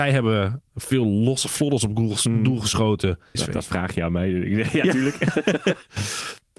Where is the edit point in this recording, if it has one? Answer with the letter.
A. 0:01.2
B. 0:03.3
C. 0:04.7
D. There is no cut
B